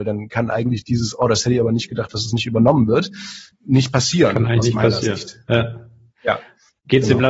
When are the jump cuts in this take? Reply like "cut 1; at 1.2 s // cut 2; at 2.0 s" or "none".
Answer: none